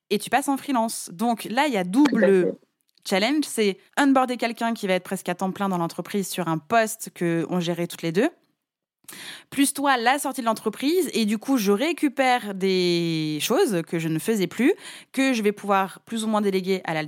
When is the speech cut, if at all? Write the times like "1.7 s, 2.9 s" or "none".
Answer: 3.9 s